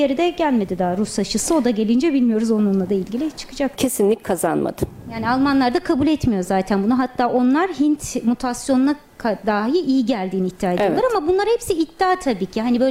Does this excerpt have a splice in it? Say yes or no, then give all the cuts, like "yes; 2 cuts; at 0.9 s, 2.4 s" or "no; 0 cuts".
yes; 1 cut; at 3.8 s